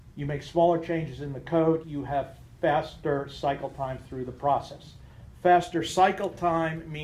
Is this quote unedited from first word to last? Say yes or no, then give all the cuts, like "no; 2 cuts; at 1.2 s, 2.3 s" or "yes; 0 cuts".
no; 1 cut; at 1.8 s